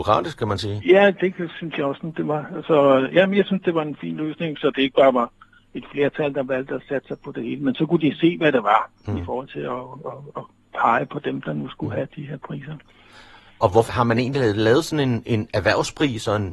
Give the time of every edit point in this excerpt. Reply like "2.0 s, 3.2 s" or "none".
13.9 s